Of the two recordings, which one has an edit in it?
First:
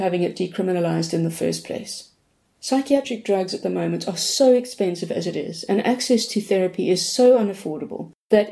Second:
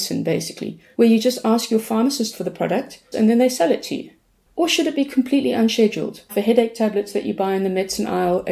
second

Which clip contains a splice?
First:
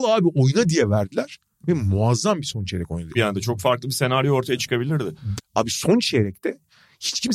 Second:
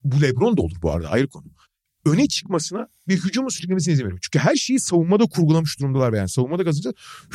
first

